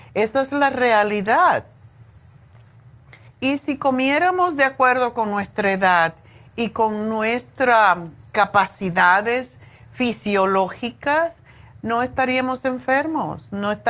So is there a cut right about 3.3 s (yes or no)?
yes